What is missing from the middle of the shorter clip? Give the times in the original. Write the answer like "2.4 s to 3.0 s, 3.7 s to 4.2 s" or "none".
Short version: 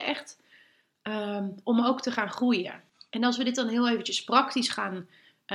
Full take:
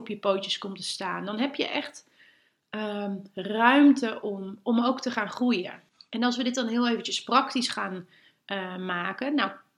3.3 s to 4.6 s